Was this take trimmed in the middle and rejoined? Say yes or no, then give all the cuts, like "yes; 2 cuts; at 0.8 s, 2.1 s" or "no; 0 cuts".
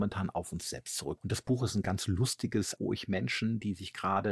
yes; 2 cuts; at 1.2 s, 2.8 s